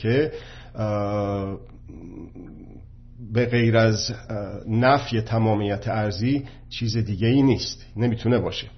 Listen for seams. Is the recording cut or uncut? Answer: uncut